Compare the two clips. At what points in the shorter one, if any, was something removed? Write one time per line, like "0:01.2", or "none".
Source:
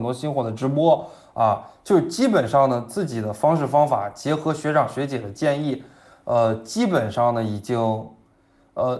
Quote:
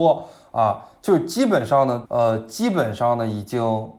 0:02.1

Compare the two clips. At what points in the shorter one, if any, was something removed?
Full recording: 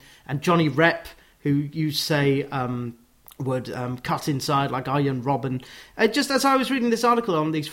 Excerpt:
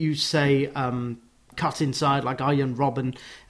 0:01.5

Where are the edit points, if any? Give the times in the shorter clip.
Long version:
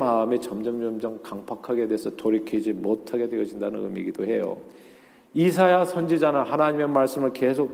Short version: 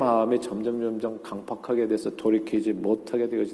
none

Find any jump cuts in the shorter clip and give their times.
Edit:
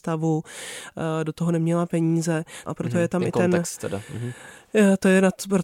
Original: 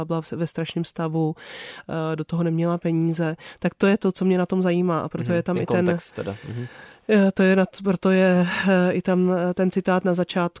0:02.7

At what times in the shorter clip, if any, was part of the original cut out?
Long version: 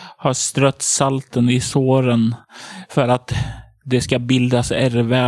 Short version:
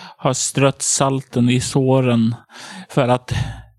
none

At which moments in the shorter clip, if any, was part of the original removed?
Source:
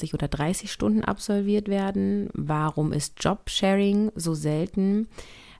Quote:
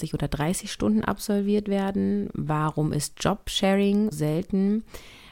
0:04.1

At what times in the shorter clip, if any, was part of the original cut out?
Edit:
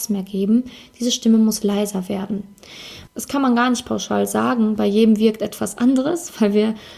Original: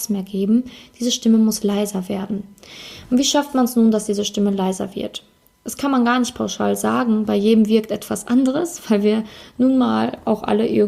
0:03.1

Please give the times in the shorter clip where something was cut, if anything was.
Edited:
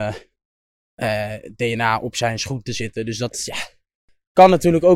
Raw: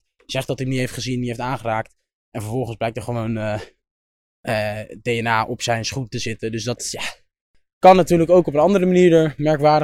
none

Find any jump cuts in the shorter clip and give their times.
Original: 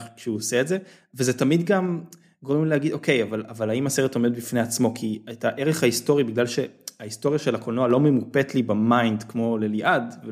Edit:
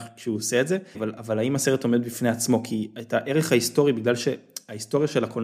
0:00.9

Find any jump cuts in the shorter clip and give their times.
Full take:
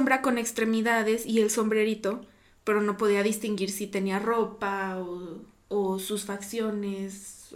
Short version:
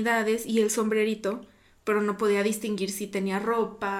none

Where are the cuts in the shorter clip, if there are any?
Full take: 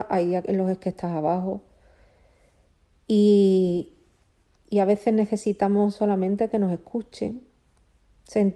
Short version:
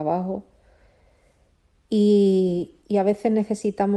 0:02.8

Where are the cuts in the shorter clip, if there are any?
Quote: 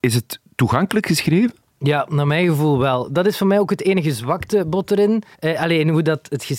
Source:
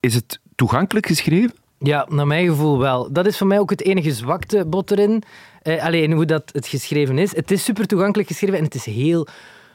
0:05.3

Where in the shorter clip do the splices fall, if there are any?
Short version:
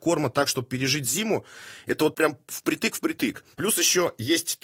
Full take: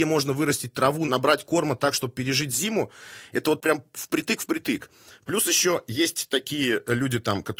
0:03.5

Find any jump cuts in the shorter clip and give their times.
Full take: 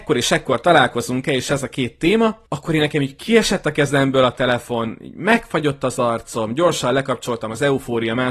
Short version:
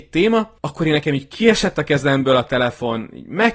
none

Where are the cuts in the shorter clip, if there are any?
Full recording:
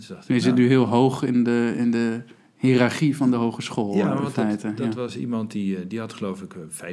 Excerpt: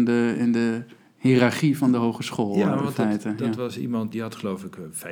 0:04.1

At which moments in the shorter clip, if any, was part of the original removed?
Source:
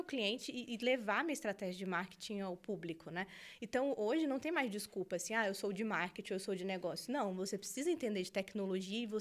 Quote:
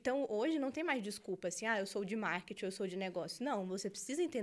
none

